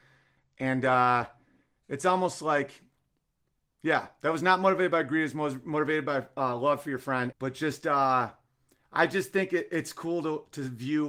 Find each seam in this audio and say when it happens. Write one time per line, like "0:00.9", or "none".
0:07.3